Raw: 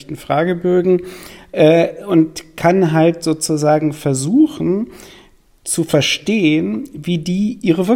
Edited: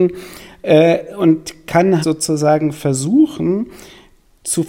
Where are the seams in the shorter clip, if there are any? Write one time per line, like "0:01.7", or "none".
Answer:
0:02.0